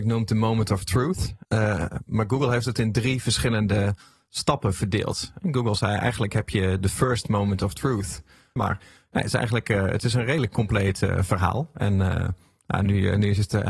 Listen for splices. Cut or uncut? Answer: cut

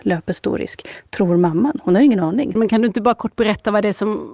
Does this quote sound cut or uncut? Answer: cut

